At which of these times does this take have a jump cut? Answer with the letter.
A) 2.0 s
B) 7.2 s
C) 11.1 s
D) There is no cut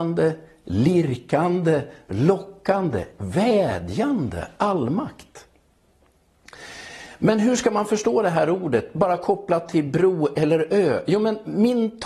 D